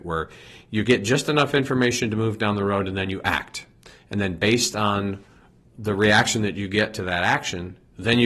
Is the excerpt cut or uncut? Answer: uncut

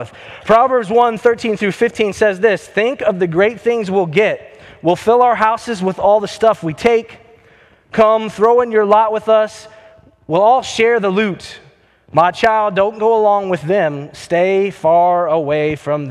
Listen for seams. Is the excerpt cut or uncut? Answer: uncut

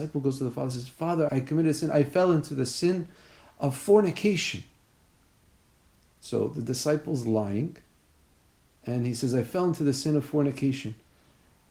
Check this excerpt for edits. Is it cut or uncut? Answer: cut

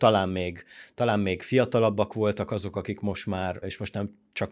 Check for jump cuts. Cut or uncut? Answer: cut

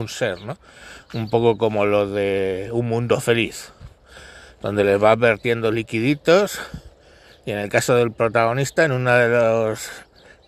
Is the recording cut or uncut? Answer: uncut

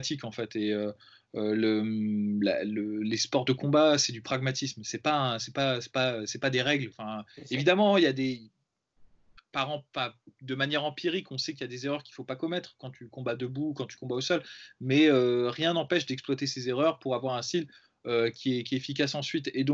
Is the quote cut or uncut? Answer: cut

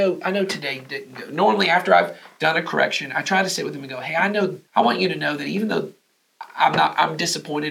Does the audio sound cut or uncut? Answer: cut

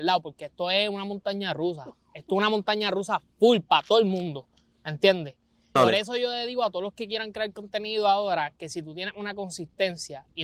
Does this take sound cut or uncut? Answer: cut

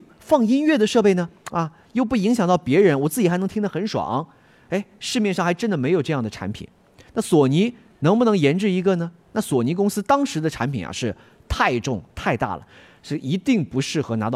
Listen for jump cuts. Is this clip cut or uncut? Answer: uncut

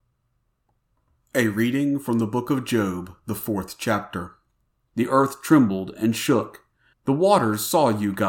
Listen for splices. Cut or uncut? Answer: cut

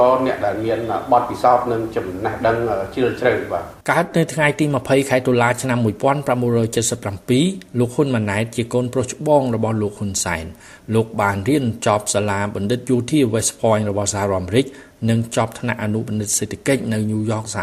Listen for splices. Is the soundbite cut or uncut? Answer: cut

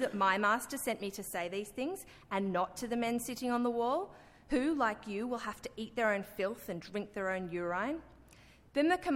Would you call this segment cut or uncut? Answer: uncut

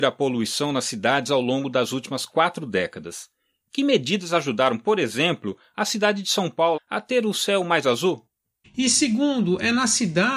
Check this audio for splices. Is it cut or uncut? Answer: cut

